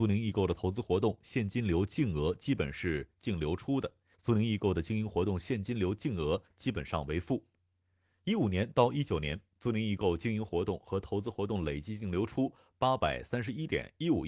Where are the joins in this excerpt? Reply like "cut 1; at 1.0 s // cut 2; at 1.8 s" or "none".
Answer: cut 1; at 4.1 s